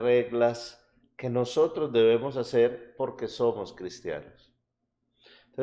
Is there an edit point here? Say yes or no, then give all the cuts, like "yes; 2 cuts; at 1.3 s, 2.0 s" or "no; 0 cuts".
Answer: no; 0 cuts